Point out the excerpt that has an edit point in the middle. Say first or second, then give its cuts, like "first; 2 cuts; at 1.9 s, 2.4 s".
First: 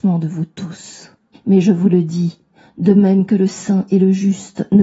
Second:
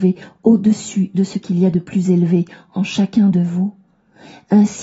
first; 1 cut; at 1.3 s